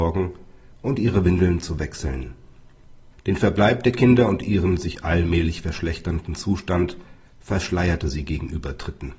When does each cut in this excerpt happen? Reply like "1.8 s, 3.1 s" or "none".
3.1 s